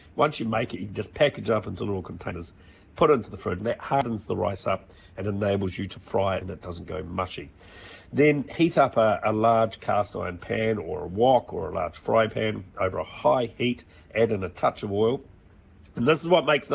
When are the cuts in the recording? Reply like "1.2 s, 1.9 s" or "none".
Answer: 3.6 s